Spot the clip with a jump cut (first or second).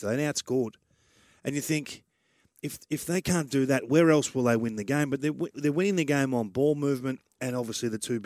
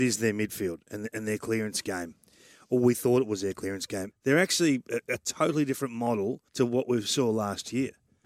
second